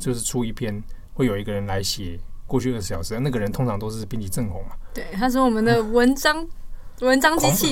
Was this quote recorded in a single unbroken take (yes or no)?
yes